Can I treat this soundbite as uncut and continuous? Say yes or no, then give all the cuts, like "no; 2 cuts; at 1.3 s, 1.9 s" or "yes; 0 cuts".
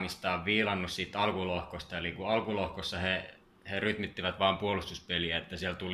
yes; 0 cuts